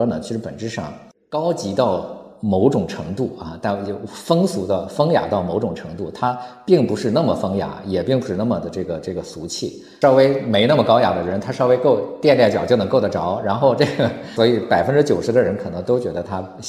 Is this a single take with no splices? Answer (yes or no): yes